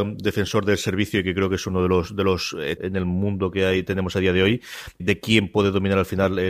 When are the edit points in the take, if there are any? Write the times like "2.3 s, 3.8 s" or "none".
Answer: 2.8 s, 5.0 s